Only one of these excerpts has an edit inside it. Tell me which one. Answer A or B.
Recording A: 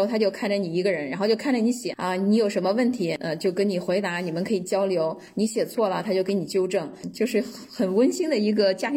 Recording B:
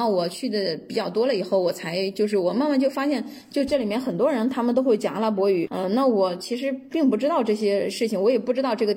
B